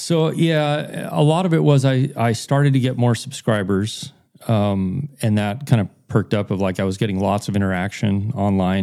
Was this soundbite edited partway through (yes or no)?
no